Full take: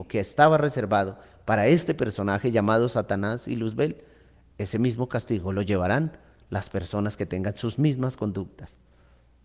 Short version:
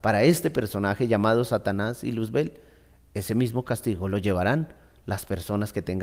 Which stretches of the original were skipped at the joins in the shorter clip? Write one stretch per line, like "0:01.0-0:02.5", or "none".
none